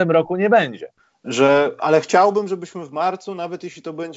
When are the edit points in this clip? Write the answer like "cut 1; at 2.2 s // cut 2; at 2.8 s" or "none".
none